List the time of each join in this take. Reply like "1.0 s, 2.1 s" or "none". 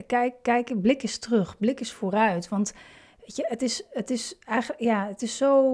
none